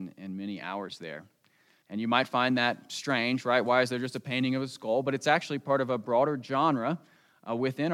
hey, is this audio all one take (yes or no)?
no